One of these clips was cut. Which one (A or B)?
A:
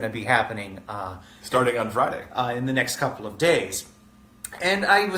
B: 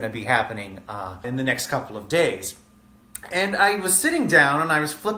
B